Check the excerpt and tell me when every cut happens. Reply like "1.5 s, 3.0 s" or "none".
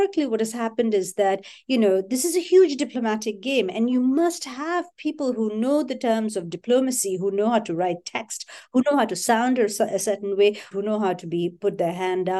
10.7 s